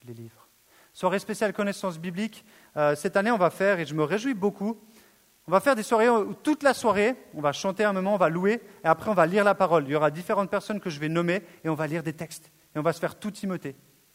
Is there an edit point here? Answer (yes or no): no